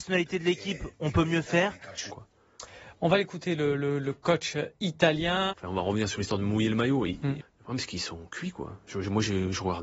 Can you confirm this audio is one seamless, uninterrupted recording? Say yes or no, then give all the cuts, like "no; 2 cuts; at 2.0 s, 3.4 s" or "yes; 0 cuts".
no; 3 cuts; at 2.1 s, 5.5 s, 7.4 s